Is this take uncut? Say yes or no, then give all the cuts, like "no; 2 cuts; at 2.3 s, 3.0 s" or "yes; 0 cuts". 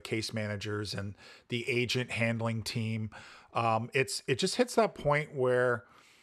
yes; 0 cuts